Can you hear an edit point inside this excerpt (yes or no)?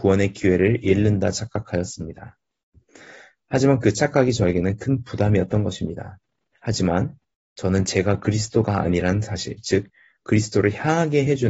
yes